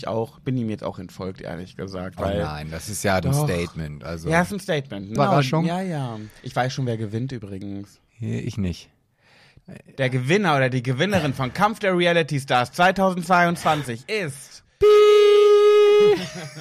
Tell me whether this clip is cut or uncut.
cut